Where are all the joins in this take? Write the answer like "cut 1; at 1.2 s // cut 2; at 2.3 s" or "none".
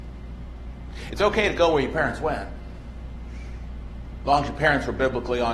cut 1; at 1.1 s